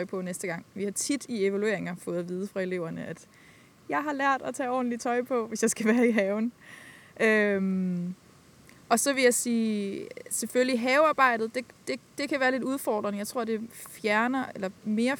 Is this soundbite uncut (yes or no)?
yes